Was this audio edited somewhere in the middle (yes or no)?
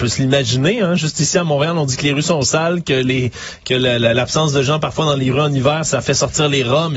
no